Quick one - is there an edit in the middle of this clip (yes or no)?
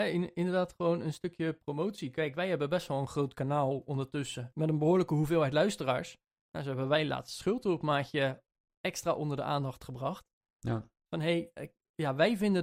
no